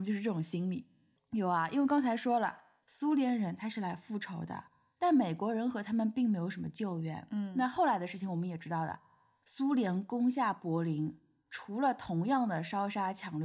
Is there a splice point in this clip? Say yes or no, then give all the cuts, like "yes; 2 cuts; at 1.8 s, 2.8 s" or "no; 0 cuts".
yes; 1 cut; at 1.2 s